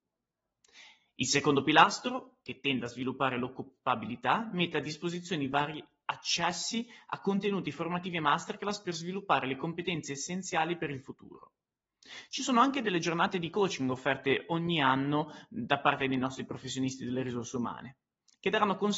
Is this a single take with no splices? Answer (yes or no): yes